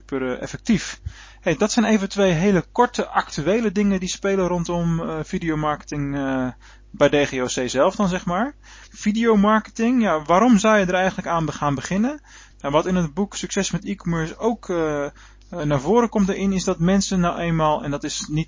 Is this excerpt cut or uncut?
cut